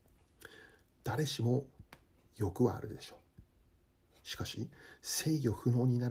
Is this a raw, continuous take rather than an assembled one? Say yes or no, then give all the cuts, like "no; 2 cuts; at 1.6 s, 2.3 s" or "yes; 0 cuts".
yes; 0 cuts